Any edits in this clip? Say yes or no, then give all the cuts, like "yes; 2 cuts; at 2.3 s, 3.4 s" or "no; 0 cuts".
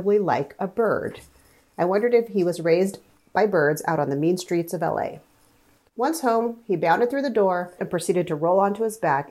yes; 1 cut; at 7.8 s